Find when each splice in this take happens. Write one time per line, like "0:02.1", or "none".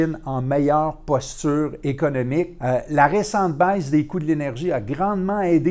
0:02.6